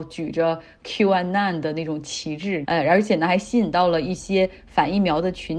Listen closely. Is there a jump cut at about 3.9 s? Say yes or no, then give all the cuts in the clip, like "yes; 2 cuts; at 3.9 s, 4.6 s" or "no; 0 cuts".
no; 1 cut; at 2.6 s